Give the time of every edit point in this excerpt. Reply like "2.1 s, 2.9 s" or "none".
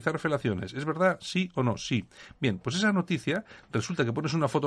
none